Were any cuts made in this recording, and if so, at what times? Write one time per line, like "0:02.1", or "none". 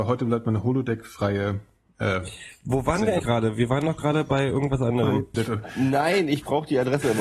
0:03.2
0:05.3